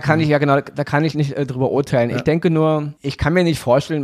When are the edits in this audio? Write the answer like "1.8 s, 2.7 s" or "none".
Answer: 1.1 s, 3.0 s